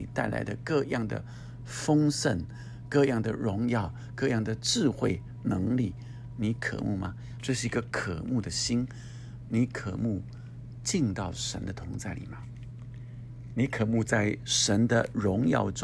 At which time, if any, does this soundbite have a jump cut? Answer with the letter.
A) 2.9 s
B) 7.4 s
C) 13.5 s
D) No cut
B